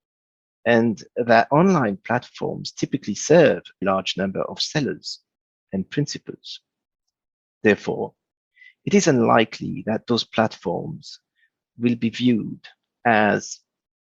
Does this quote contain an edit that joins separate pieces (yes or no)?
yes